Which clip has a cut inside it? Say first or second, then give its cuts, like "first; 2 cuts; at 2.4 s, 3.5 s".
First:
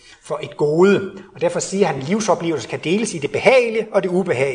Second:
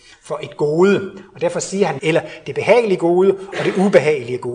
second; 1 cut; at 2.0 s